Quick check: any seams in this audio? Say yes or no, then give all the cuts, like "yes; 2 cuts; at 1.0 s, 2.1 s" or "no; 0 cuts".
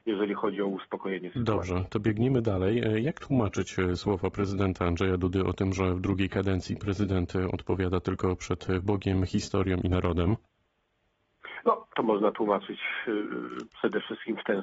no; 0 cuts